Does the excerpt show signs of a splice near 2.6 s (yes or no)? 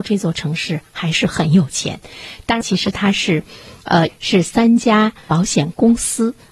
yes